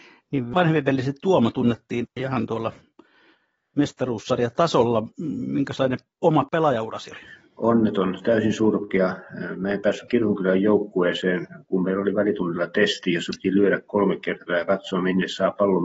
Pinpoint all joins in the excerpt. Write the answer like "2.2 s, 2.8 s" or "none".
none